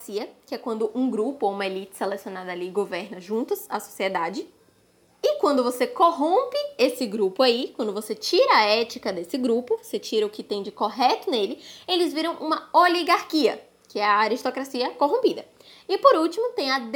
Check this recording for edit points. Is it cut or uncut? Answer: uncut